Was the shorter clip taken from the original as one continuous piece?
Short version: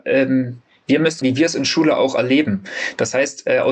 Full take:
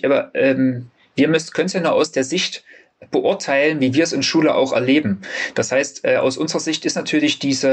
no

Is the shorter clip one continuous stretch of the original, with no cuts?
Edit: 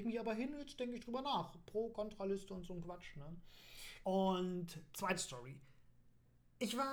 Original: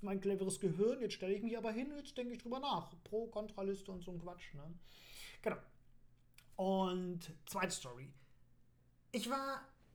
no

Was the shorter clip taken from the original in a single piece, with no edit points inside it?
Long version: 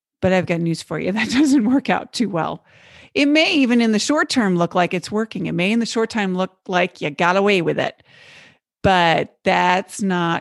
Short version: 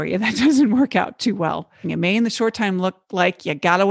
no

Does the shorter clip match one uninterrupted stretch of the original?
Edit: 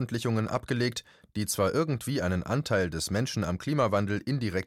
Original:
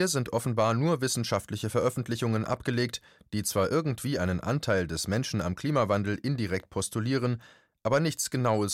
yes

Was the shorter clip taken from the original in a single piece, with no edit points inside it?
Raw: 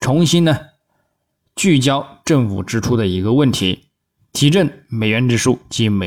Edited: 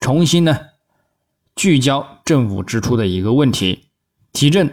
yes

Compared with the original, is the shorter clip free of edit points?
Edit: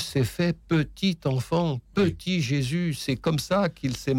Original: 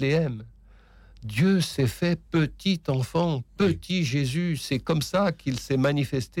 yes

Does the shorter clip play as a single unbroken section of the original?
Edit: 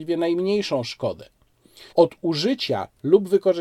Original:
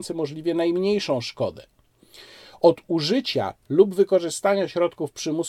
no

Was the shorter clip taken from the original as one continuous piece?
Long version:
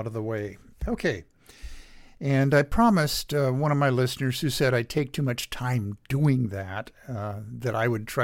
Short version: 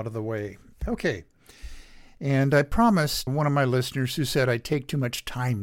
no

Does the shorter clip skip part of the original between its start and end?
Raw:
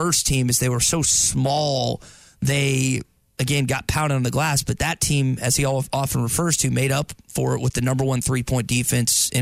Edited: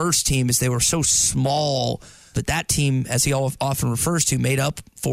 yes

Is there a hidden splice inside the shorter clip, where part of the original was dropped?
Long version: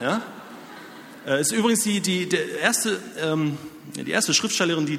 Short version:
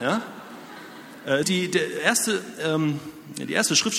yes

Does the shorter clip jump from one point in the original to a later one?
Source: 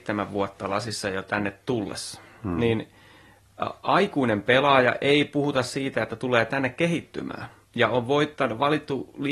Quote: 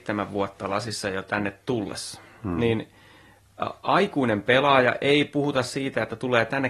no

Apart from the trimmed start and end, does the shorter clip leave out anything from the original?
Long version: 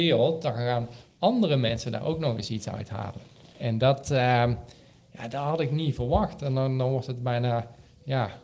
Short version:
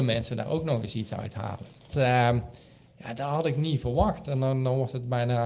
yes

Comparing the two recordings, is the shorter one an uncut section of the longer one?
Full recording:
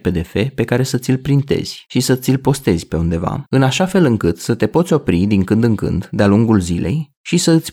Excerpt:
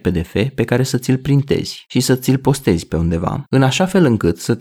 yes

